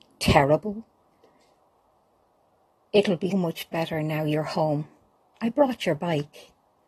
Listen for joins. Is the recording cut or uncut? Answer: cut